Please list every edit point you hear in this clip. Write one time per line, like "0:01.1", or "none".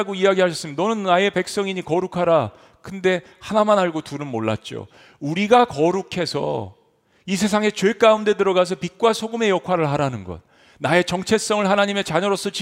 none